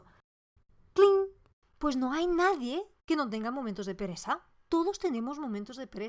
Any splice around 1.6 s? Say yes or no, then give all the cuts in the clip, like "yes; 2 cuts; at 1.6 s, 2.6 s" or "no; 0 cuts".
yes; 1 cut; at 1.6 s